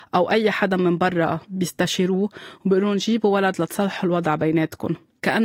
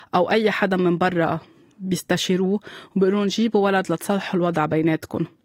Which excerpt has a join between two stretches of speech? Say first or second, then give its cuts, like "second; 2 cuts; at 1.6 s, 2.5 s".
first; 1 cut; at 1.4 s